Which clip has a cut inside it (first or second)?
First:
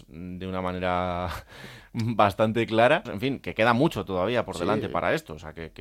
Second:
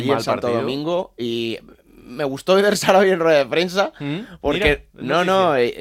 first